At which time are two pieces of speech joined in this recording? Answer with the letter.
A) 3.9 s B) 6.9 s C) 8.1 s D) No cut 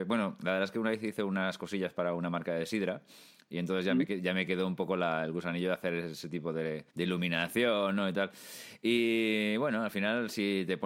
B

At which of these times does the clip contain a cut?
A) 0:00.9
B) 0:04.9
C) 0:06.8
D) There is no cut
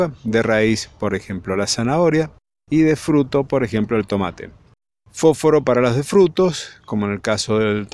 B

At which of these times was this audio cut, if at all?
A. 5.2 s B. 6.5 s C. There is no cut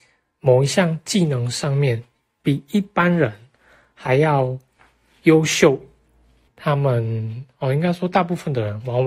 B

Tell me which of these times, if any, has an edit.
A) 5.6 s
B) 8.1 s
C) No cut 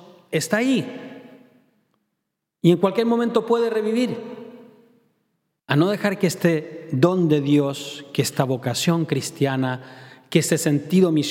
A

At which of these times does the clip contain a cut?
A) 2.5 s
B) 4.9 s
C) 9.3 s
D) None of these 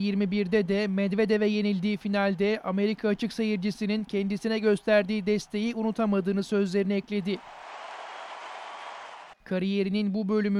C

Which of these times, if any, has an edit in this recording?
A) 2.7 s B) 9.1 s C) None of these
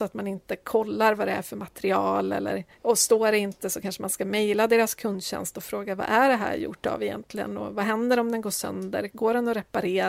A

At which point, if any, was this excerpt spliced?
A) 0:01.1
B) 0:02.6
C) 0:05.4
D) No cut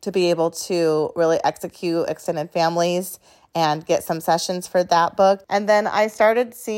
C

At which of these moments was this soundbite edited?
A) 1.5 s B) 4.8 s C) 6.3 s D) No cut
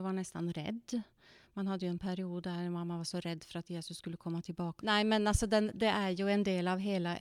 B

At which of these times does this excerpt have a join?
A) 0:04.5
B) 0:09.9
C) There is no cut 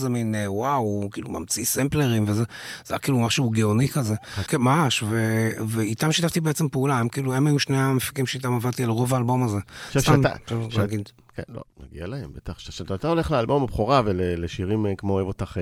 A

